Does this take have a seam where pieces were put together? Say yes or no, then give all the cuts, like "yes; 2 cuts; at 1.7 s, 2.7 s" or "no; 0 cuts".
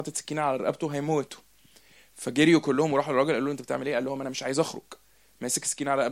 no; 0 cuts